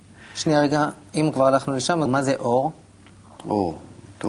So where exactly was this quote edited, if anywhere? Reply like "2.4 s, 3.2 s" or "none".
2.1 s